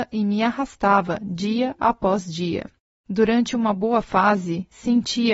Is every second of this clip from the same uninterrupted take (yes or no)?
no